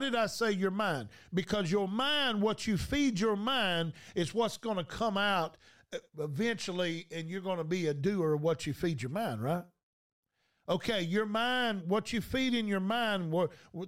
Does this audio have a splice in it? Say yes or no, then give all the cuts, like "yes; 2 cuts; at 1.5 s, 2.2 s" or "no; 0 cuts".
no; 0 cuts